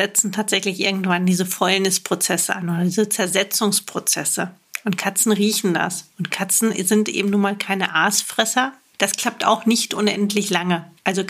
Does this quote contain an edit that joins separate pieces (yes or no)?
yes